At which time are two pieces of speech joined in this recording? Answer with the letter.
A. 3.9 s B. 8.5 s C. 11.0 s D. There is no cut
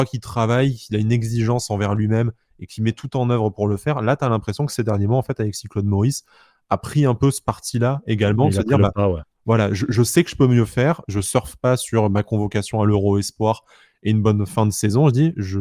C